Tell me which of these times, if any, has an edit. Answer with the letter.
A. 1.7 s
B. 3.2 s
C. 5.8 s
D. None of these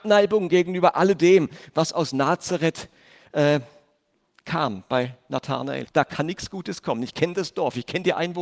C